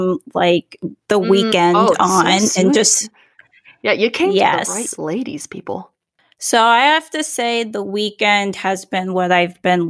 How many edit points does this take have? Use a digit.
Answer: 0